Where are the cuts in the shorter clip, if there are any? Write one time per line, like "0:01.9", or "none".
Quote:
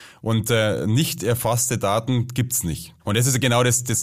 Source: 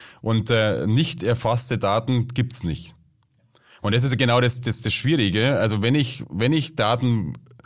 0:03.0